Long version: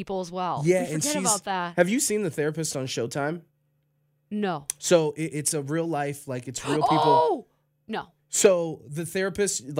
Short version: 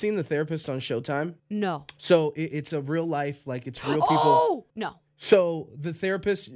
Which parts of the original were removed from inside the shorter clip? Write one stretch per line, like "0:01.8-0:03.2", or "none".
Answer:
0:03.5-0:04.2
0:07.5-0:07.8

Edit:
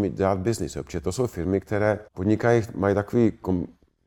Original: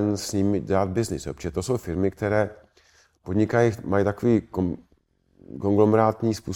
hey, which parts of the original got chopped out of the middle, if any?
0:02.6-0:03.2

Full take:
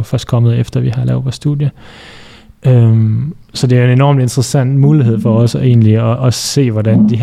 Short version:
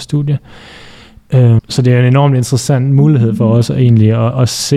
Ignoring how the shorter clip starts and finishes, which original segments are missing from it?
0:02.9-0:03.4

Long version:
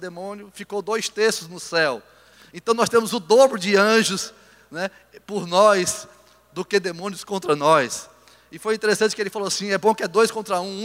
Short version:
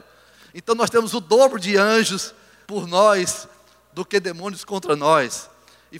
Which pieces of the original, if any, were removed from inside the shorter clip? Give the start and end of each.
0:04.6-0:05.3

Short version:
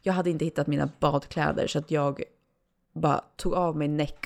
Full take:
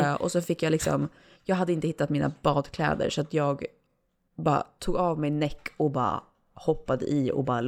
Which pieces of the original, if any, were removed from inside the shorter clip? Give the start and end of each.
none

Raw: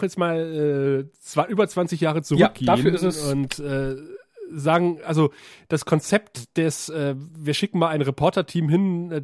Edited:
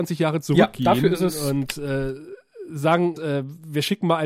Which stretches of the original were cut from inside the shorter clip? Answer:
0:05.0-0:06.9

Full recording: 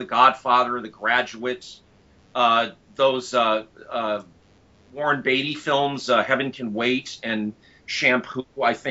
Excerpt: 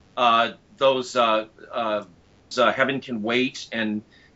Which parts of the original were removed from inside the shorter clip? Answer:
0:04.7-0:06.0

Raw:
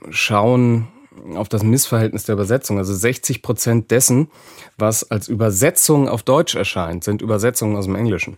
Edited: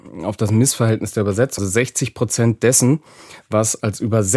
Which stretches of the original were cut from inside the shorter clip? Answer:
0:02.7-0:02.9

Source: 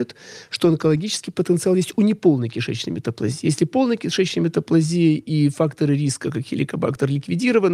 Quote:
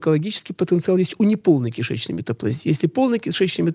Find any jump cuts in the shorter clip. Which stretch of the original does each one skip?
none

